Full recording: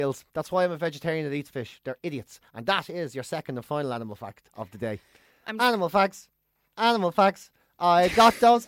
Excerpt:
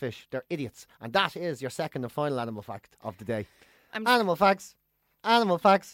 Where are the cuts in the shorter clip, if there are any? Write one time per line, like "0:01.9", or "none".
none

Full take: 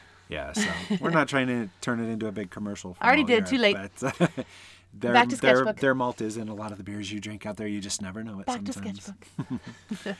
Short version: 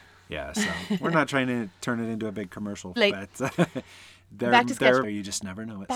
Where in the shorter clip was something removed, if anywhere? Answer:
0:03.0
0:05.0

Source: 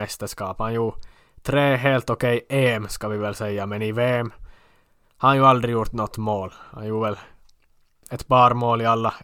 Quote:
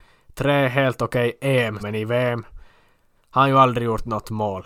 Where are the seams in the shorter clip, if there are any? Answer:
0:01.8

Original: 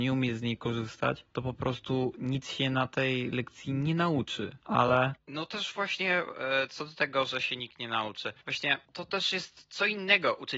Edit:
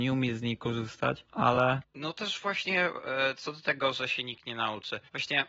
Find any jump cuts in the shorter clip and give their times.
0:01.3

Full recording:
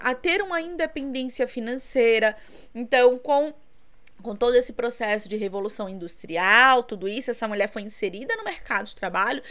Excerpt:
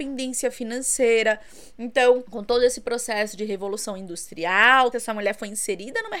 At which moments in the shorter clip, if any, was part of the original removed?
0:02.2
0:04.9

